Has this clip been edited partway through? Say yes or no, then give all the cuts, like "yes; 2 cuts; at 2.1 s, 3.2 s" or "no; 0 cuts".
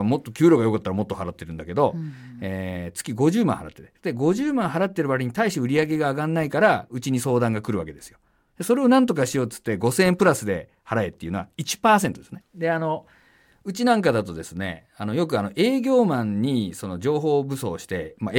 yes; 1 cut; at 12.4 s